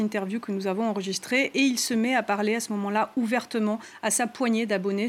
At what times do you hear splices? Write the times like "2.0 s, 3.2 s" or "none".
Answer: none